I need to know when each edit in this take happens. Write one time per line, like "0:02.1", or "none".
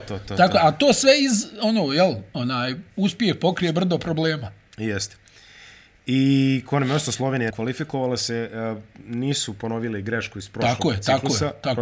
0:07.5